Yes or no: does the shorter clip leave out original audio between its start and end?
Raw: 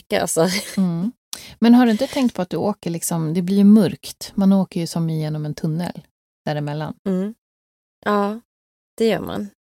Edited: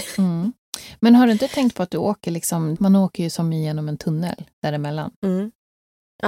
yes